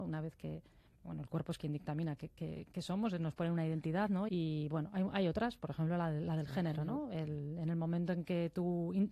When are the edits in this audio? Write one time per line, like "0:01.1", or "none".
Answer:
0:04.3